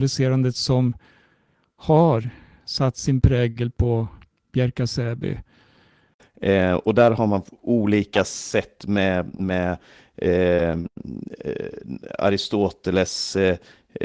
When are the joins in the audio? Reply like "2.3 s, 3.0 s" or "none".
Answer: 6.2 s